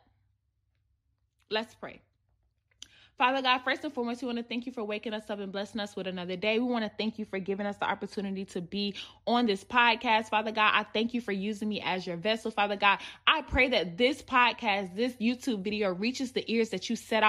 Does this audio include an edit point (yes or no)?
no